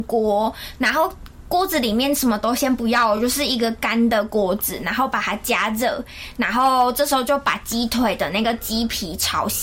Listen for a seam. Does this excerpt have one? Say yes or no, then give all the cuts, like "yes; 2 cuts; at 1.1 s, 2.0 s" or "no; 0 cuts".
no; 0 cuts